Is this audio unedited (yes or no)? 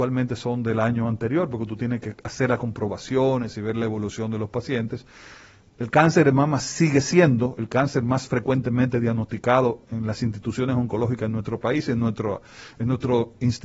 no